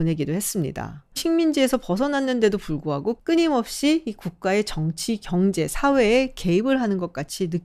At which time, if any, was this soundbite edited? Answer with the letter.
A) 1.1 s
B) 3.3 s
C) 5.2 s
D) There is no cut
A